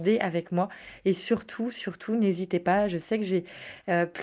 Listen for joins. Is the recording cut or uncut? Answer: uncut